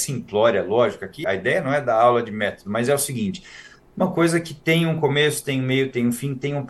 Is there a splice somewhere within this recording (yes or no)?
yes